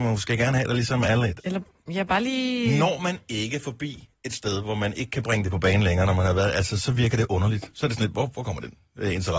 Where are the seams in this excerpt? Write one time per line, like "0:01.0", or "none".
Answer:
0:01.4

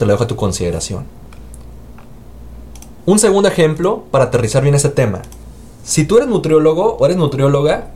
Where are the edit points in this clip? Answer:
none

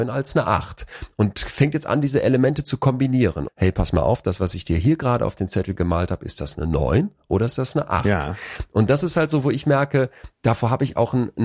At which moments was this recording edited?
0:03.5

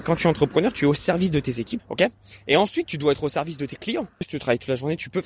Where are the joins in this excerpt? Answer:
0:01.8
0:04.2

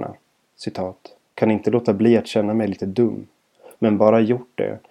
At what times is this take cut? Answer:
0:01.2
0:03.8

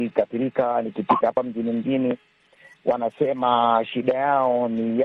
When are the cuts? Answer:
none

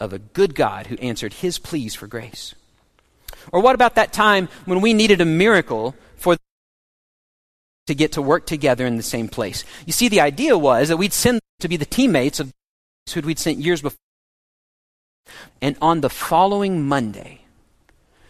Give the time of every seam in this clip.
0:11.5
0:15.5

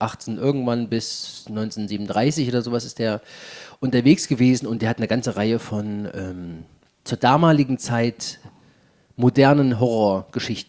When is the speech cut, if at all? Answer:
none

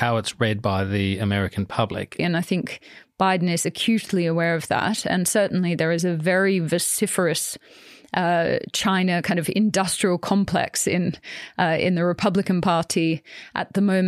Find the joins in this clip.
0:02.2

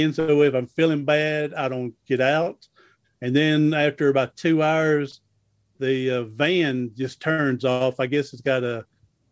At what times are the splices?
0:03.0

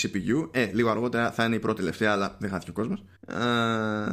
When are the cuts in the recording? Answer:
0:03.2

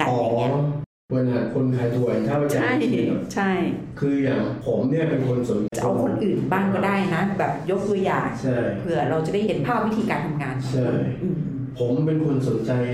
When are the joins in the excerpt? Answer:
0:05.7

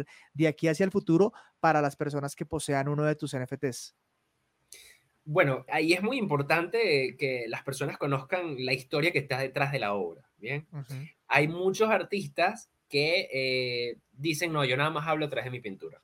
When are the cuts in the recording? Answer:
0:05.7

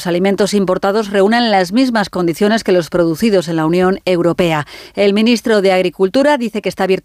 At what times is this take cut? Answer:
none

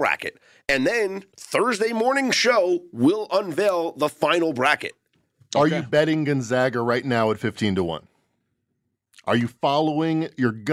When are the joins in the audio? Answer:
0:01.3

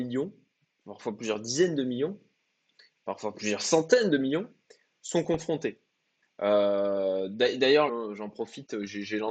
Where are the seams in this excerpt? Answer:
0:06.2
0:07.9

